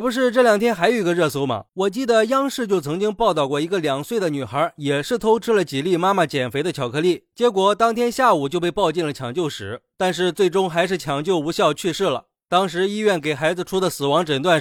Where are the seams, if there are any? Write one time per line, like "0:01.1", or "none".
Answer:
0:01.7

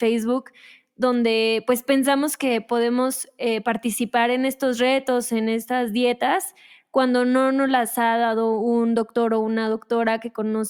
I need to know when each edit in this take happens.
none

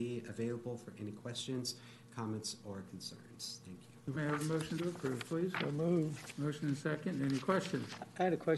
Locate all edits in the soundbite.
0:04.2
0:06.3

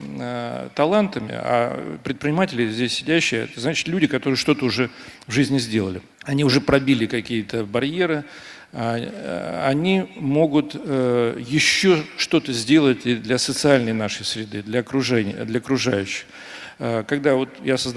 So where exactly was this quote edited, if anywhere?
0:06.1
0:08.7

